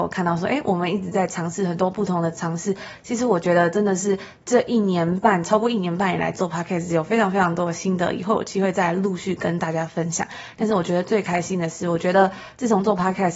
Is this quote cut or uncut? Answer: uncut